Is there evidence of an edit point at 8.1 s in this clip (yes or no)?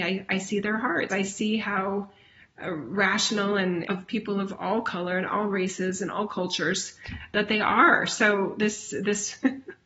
no